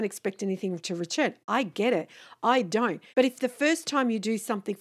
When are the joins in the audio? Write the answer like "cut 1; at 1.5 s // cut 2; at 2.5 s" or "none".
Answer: cut 1; at 3.1 s